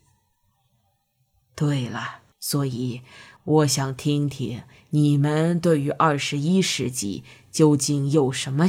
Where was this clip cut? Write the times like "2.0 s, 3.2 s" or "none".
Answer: 2.3 s